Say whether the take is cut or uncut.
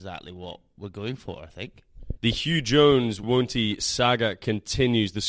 cut